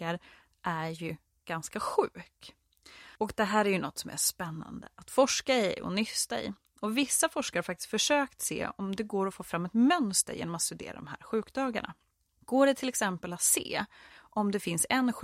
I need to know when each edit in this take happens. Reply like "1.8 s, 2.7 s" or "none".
14.1 s